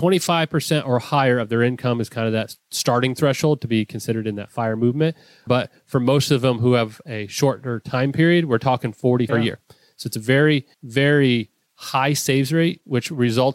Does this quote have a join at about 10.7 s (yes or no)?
yes